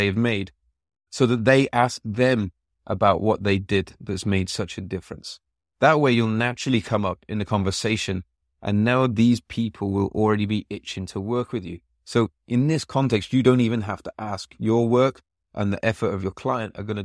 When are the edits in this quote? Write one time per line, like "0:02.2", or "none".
none